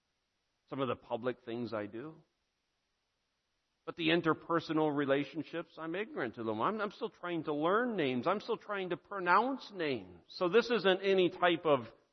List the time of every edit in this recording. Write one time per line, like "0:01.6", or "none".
none